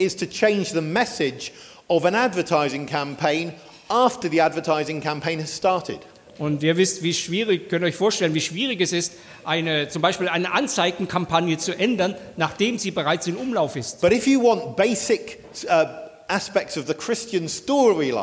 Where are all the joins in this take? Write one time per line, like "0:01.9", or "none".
none